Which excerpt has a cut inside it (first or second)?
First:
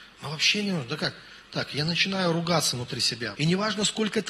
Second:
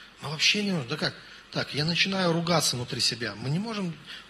first